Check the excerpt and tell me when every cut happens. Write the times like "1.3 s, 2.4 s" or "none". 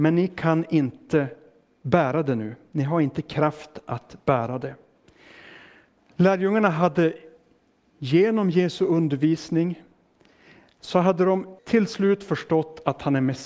11.6 s